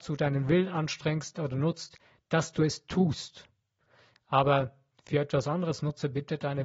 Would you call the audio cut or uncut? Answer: uncut